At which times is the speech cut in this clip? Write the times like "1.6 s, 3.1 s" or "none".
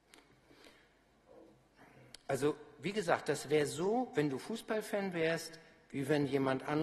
none